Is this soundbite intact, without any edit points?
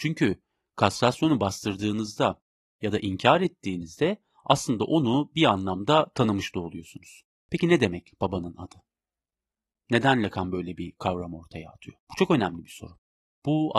no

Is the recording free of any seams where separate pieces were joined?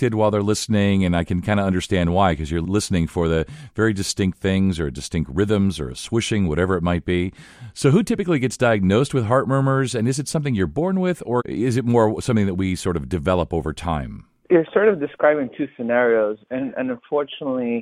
yes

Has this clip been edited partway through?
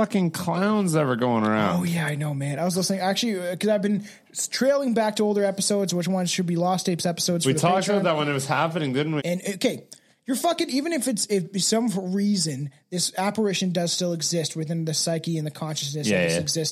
yes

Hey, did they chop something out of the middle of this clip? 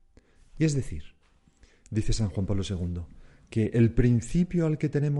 no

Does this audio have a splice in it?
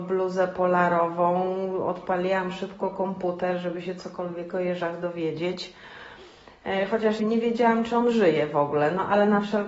yes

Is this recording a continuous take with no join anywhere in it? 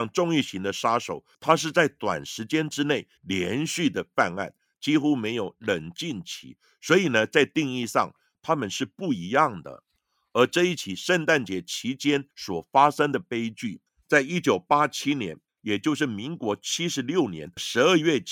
no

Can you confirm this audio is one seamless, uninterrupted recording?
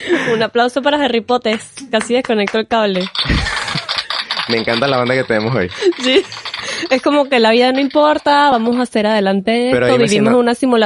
yes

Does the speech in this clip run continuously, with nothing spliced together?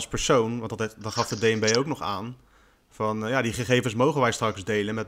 yes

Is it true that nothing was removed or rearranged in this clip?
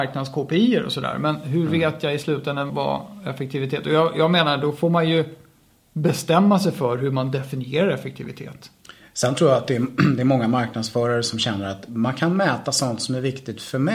no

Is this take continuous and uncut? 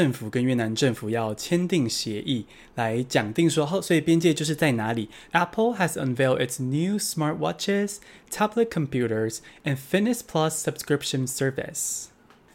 no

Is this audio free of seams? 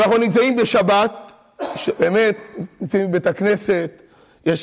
no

